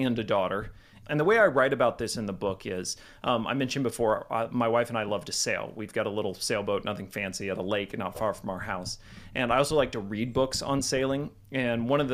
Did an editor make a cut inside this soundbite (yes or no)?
yes